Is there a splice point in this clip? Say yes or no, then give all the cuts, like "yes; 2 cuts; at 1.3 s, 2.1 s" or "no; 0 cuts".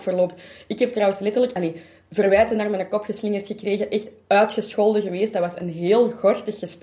no; 0 cuts